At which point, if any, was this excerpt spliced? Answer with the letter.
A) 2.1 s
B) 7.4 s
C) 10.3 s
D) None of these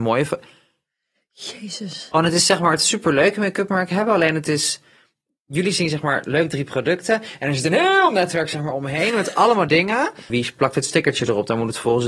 C